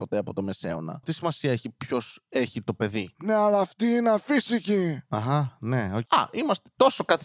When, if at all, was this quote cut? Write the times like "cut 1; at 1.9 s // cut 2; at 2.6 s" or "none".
cut 1; at 1.0 s // cut 2; at 6.1 s